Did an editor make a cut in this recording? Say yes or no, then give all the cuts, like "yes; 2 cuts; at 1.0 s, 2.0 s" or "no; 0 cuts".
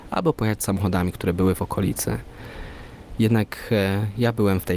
no; 0 cuts